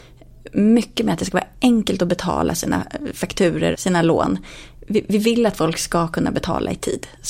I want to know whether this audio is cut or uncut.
cut